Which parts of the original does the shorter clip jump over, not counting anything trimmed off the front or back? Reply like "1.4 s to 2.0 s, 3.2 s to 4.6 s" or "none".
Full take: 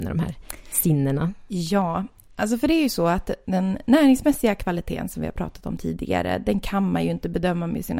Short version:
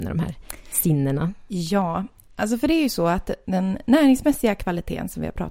none